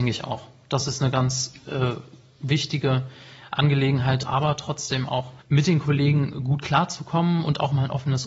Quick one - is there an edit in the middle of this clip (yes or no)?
yes